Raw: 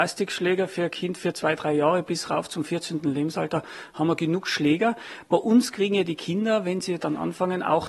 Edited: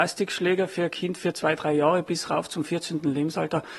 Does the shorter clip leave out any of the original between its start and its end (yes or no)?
no